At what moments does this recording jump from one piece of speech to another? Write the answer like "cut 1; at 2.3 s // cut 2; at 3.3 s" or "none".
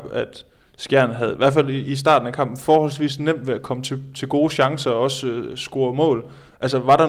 none

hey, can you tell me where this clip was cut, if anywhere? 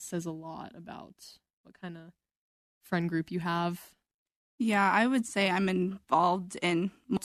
none

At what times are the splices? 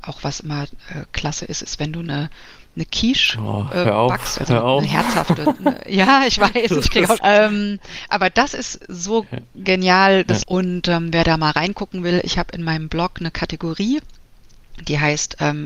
cut 1; at 7.2 s // cut 2; at 10.4 s

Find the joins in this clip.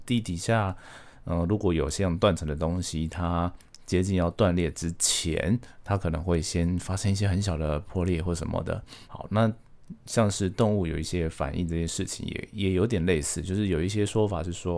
cut 1; at 9.1 s

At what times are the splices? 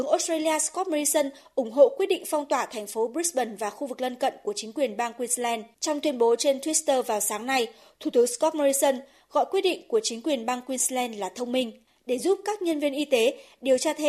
cut 1; at 5.7 s

